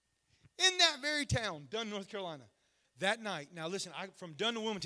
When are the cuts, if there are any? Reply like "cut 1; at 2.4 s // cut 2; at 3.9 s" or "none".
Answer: cut 1; at 2.8 s